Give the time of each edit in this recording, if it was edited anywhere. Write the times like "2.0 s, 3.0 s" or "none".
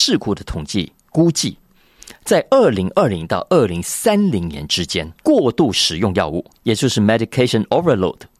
5.2 s

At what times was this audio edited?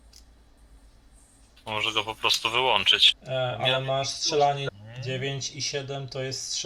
3.1 s, 4.7 s

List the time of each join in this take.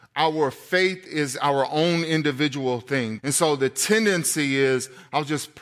3.2 s

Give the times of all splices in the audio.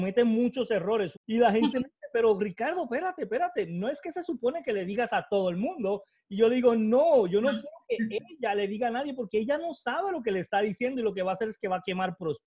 1.1 s

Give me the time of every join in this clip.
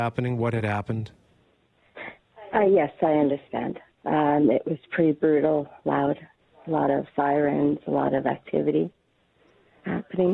none

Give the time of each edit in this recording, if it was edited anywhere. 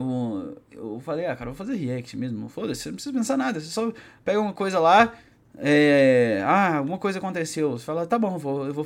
none

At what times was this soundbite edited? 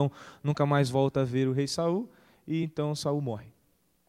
none

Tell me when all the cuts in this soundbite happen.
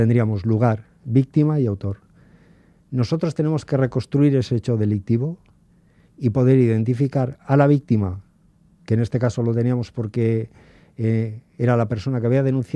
none

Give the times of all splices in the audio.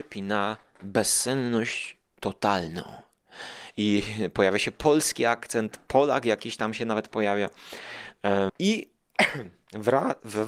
3.7 s, 8.5 s

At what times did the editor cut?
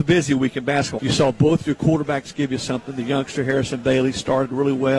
1.0 s

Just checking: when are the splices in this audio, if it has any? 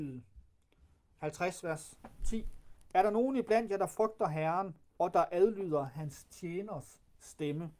none

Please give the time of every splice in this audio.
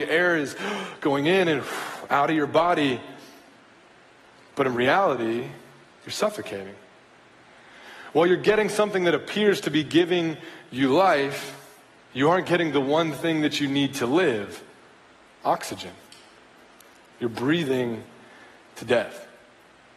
none

